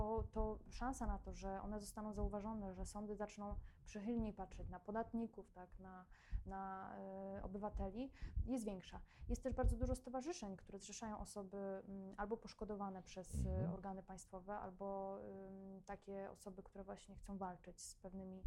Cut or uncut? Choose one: uncut